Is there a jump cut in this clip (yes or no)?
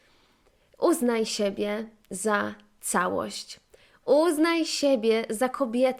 yes